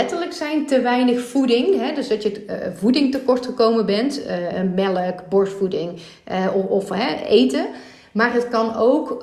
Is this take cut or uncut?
uncut